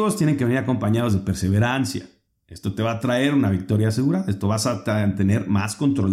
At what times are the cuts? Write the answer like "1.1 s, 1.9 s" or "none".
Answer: none